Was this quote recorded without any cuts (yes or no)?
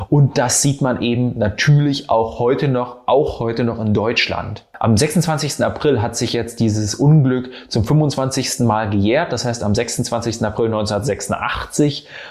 yes